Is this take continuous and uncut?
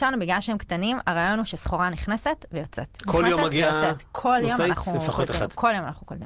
yes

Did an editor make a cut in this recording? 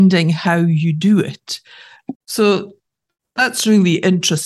yes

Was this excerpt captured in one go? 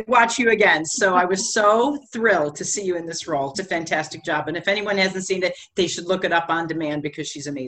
no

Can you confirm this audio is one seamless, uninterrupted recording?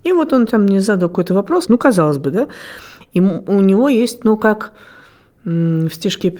no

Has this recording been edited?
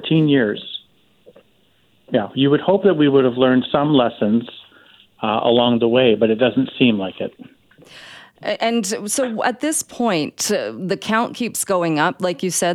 no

